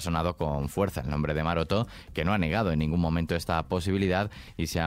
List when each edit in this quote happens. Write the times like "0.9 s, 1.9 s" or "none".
none